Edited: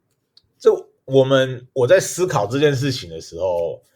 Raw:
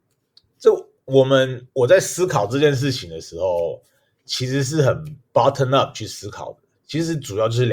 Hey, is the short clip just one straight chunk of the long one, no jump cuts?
yes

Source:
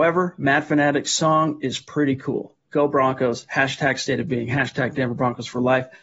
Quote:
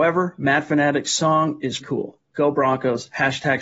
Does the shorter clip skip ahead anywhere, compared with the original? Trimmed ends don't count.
yes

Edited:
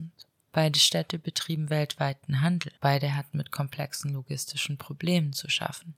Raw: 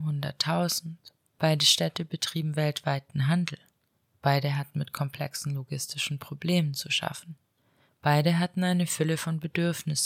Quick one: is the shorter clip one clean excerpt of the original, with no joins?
no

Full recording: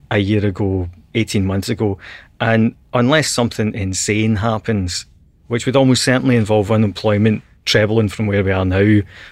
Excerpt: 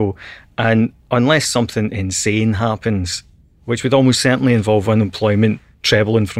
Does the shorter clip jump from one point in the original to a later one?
no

